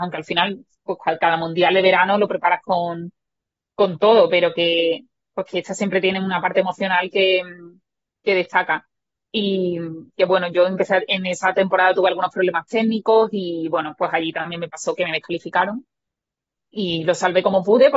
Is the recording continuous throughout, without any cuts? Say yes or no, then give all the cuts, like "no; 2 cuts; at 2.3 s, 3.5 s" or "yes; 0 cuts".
no; 1 cut; at 10.1 s